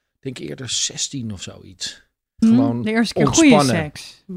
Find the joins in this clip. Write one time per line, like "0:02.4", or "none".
0:02.4